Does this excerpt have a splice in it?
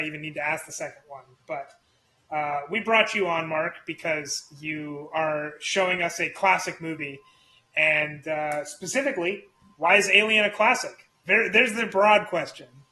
no; 0 cuts

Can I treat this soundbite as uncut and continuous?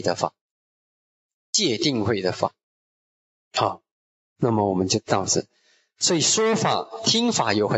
yes; 0 cuts

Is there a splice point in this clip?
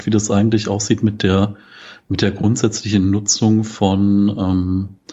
no; 0 cuts

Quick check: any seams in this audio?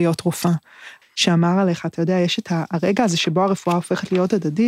yes; 1 cut; at 1.0 s

